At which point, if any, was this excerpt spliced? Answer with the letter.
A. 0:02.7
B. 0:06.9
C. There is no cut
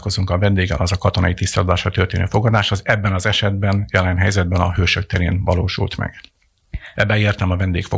B